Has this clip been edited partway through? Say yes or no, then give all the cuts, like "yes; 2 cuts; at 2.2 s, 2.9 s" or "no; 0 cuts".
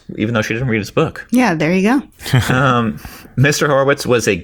yes; 1 cut; at 2.1 s